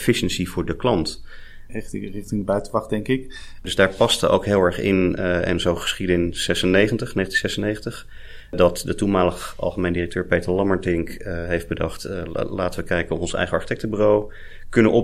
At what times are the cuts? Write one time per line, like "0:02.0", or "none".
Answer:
0:01.7
0:03.6